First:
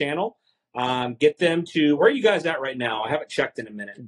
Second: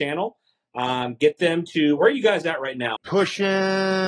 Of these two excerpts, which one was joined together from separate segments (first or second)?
second